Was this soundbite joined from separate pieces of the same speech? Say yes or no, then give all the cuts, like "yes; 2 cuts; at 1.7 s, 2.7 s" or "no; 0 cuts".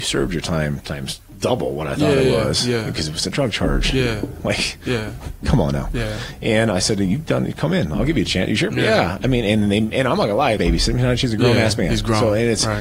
yes; 1 cut; at 10.6 s